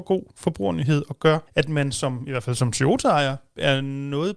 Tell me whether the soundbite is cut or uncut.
cut